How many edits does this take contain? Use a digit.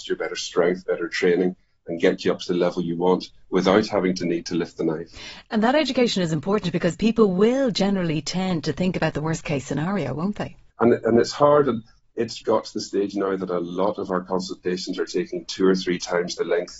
2